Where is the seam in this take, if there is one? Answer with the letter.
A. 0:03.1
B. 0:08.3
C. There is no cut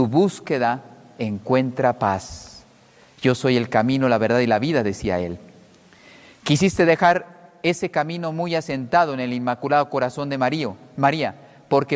C